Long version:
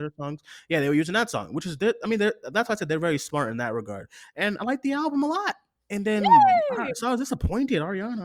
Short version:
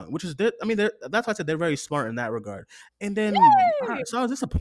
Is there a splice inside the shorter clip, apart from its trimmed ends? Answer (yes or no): yes